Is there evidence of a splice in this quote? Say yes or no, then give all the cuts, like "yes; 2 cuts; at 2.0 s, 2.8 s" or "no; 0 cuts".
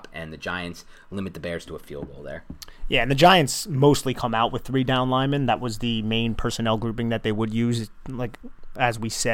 no; 0 cuts